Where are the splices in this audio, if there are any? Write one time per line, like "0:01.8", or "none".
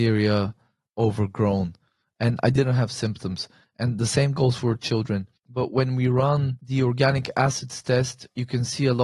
0:05.4

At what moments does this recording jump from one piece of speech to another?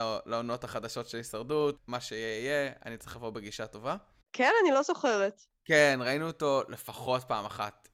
0:01.8
0:04.2

